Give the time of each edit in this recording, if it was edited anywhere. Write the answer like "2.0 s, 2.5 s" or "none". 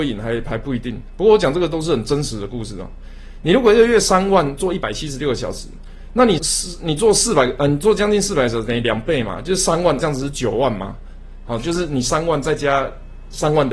6.4 s, 10.0 s